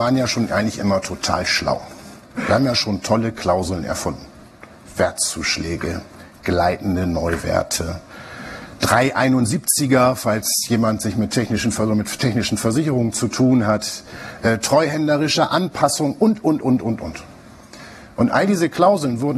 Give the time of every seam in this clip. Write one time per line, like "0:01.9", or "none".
none